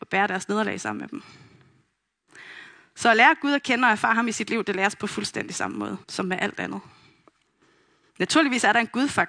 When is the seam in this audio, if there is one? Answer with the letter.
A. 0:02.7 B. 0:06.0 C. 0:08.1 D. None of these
B